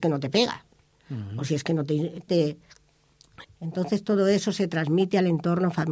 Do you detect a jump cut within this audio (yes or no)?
yes